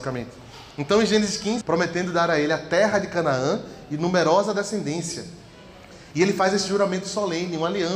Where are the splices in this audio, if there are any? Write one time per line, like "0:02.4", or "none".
0:01.6